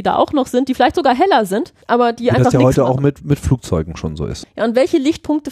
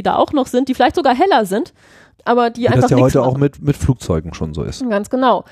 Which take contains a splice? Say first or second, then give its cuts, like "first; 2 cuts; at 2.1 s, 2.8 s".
first; 2 cuts; at 1.8 s, 4.4 s